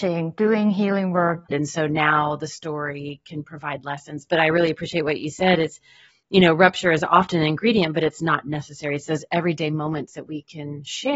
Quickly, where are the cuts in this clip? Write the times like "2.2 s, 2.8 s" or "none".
1.5 s